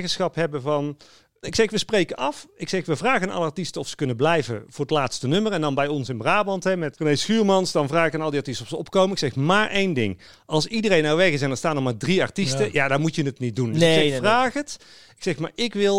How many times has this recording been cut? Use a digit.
2